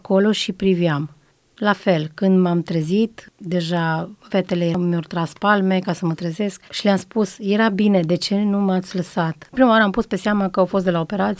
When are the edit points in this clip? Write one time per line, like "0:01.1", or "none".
0:06.7
0:09.5